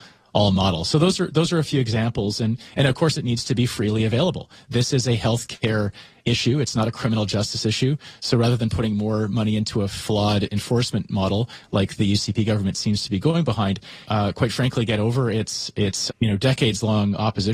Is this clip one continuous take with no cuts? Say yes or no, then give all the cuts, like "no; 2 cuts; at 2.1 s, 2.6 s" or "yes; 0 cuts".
no; 2 cuts; at 14.0 s, 16.1 s